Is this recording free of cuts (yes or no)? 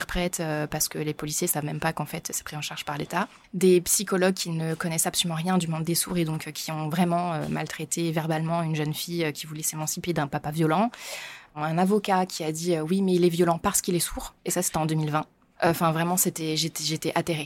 no